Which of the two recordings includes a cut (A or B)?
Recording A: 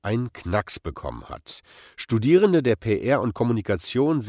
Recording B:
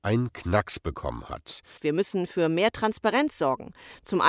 B